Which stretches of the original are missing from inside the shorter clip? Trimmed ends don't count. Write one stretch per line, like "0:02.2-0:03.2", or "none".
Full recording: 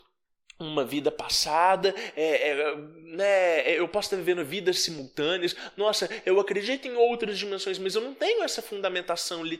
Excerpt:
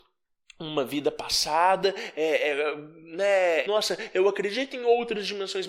0:03.6-0:05.7